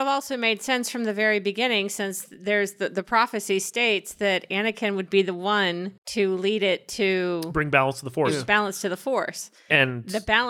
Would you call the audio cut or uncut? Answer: cut